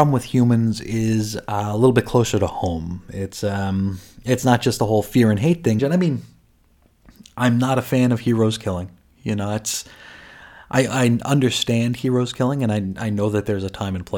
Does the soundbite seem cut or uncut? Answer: cut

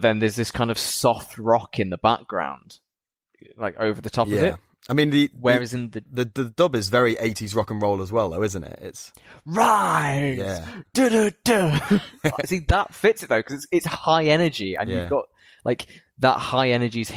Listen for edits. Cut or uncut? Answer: uncut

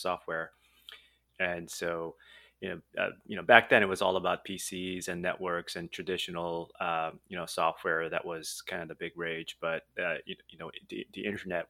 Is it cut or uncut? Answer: cut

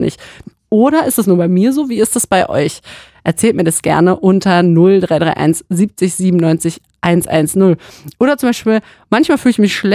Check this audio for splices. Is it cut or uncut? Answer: uncut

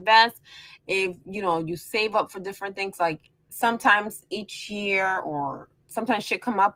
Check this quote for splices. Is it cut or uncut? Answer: uncut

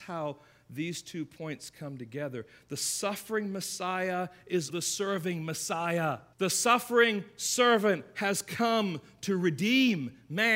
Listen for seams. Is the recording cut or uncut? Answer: cut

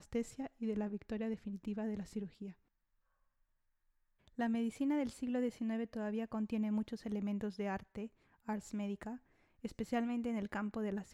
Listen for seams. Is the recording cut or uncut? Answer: cut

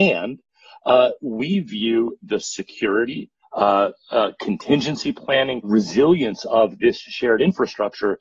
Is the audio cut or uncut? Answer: cut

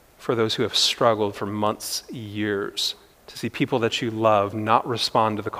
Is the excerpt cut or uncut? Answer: cut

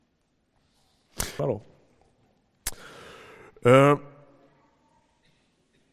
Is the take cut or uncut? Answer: cut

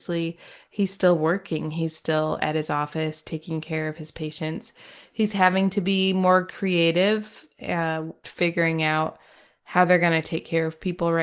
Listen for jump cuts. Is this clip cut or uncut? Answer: cut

